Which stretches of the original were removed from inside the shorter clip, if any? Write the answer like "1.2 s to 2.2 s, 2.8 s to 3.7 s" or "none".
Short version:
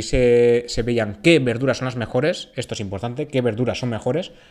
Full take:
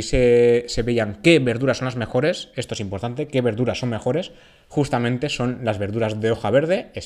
none